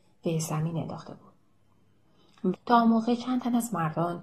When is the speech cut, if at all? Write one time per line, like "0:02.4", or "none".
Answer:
0:02.5